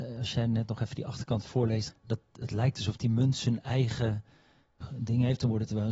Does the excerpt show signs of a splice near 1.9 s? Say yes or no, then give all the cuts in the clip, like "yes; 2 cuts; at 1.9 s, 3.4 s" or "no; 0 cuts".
yes; 1 cut; at 1.9 s